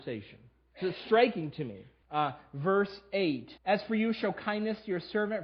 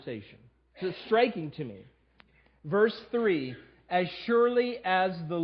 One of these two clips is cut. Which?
first; 2 cuts; at 2.0 s, 3.6 s

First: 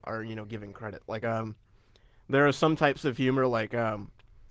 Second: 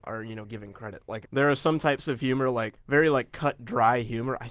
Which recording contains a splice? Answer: second; 2 cuts; at 1.2 s, 2.7 s

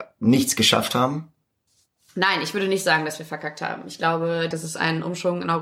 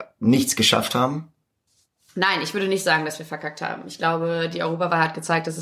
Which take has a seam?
first; 1 cut; at 4.5 s

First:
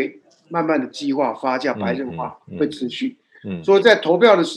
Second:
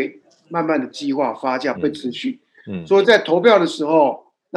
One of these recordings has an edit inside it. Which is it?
second; 1 cut; at 1.7 s

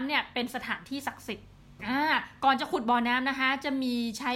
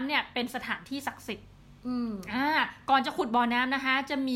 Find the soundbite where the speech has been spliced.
first; 1 cut; at 1.8 s

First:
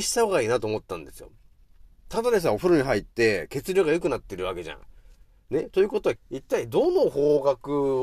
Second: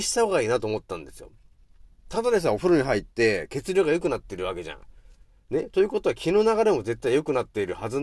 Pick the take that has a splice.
first; 1 cut; at 6.2 s

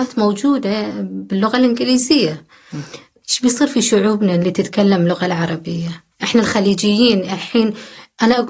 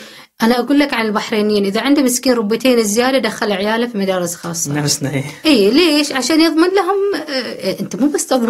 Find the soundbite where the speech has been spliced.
first; 2 cuts; at 3.2 s, 6.1 s

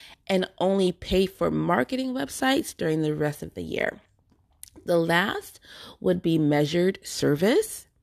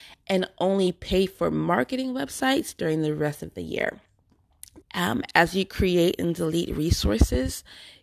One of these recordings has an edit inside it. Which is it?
second; 1 cut; at 4.8 s

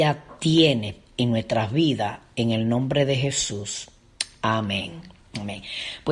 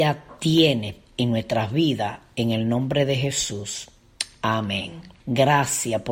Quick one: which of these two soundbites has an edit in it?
second; 1 cut; at 5.2 s

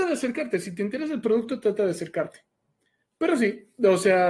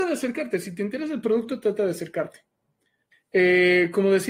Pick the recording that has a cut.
second; 1 cut; at 3.1 s

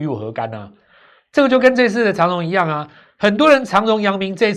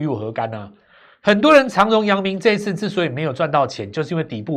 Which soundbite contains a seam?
second; 1 cut; at 1.1 s

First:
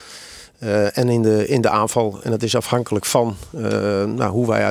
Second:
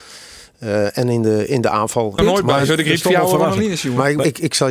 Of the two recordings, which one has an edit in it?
second; 1 cut; at 2.2 s

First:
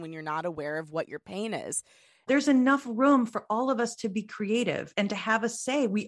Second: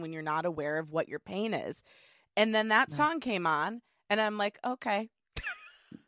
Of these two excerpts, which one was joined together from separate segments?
first; 1 cut; at 2.3 s

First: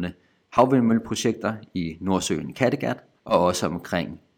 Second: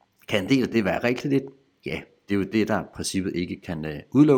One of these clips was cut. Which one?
first; 1 cut; at 3.2 s

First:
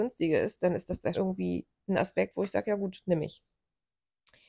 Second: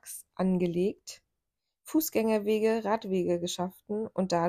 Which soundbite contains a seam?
first; 1 cut; at 1.1 s

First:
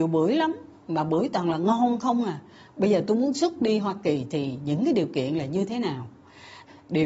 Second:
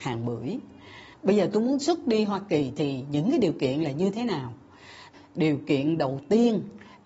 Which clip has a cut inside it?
second; 1 cut; at 1.1 s

